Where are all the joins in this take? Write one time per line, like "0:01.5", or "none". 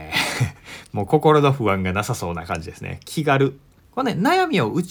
0:03.8